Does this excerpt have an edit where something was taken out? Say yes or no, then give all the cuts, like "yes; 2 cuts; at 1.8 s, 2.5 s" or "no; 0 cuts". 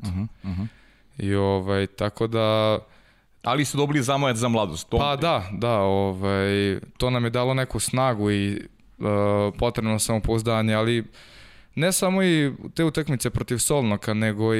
no; 0 cuts